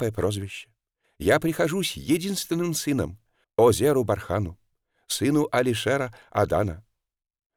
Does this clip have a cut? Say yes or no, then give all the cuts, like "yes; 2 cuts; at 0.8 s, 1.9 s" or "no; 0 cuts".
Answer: yes; 2 cuts; at 1.0 s, 3.4 s